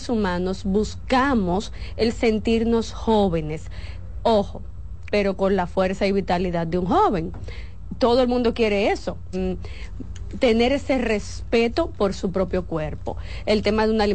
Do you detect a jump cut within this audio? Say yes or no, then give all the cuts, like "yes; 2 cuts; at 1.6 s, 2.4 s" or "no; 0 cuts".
yes; 2 cuts; at 5.1 s, 9.3 s